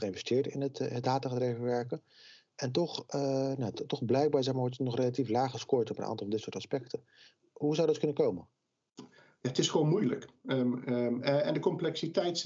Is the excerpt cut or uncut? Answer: uncut